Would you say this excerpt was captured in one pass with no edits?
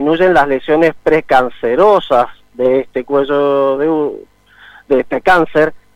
yes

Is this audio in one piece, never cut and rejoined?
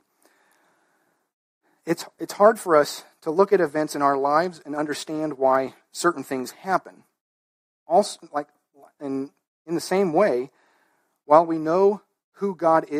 yes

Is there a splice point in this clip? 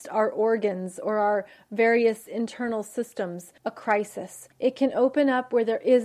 yes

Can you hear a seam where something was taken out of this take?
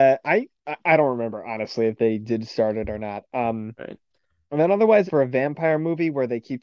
yes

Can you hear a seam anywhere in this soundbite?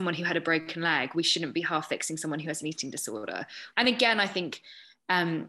yes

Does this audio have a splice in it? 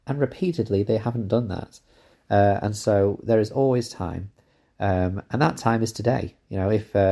no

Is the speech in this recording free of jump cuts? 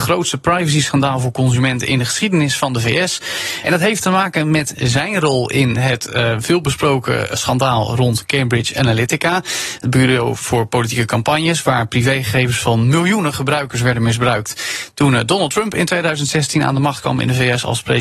no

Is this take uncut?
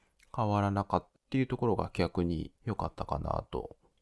no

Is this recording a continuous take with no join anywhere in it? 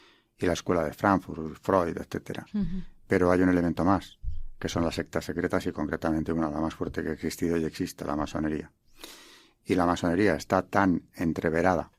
yes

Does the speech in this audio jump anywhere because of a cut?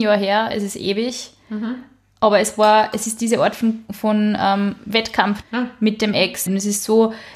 yes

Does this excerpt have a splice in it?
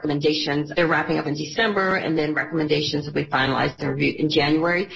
yes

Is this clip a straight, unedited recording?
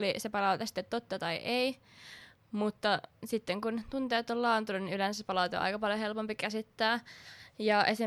yes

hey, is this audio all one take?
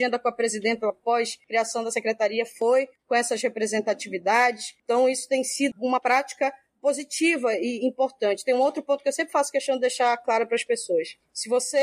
no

